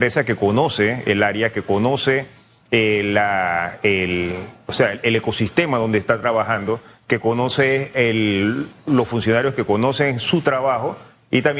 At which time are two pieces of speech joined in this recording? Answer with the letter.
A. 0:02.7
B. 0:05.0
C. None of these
C